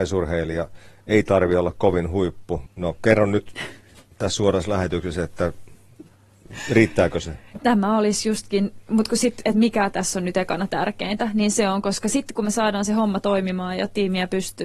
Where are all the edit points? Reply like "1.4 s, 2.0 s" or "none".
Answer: 2.7 s, 7.6 s